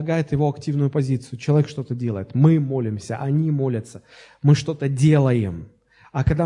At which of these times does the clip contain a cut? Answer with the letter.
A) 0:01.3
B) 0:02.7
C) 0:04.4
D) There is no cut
D